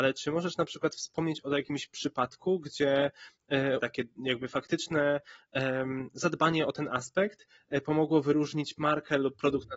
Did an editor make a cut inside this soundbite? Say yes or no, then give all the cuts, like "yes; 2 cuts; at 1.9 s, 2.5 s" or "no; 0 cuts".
yes; 1 cut; at 3.8 s